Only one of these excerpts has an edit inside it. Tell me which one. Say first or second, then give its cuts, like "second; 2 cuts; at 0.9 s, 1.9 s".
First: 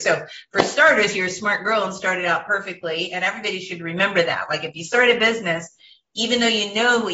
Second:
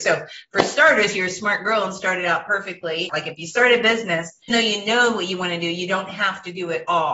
second; 2 cuts; at 3.1 s, 4.5 s